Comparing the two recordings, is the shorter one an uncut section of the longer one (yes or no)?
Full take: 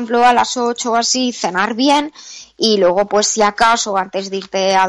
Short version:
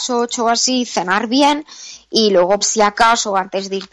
no